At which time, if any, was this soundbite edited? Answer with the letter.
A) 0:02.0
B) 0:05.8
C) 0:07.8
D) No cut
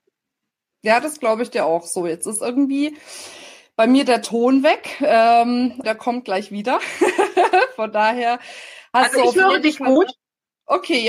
B